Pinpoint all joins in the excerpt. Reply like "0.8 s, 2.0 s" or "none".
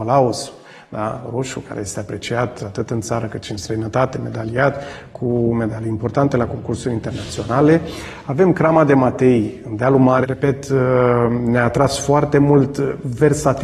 10.2 s